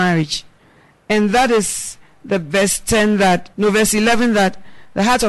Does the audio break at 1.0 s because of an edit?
no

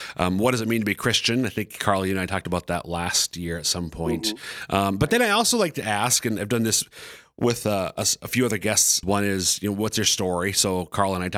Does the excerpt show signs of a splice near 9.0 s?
yes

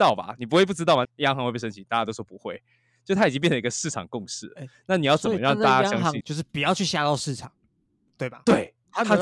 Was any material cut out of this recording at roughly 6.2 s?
yes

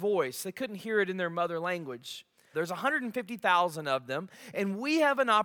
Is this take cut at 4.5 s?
yes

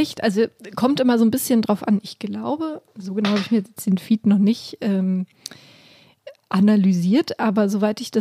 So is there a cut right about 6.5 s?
no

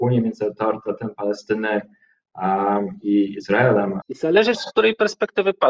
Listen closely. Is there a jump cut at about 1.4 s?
no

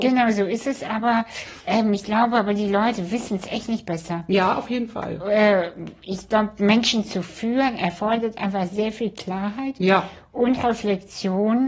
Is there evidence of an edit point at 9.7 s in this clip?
no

